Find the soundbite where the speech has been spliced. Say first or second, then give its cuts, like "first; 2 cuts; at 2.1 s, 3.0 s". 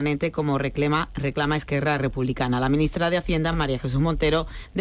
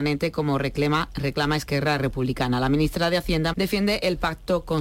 second; 1 cut; at 3.5 s